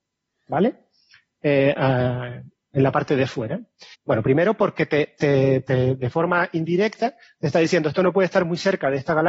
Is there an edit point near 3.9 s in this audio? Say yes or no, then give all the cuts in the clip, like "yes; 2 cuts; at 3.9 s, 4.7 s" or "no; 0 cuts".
yes; 1 cut; at 3.9 s